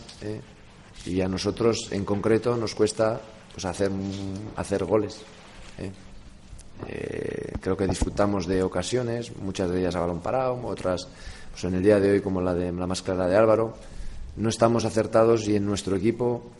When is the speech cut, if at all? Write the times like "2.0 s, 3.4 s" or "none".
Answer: none